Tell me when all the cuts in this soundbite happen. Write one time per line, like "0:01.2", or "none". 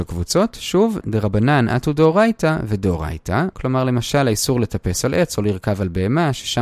0:01.0
0:03.5